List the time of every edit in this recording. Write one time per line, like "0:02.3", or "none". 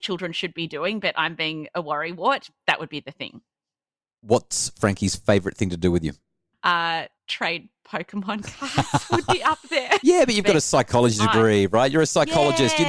0:07.1
0:10.0